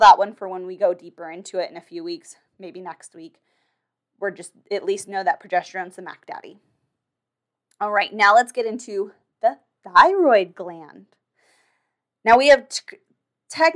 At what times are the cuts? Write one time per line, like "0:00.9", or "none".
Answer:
none